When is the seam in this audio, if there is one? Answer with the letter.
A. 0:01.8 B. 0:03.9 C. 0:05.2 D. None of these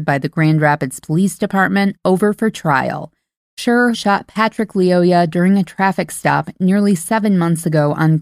B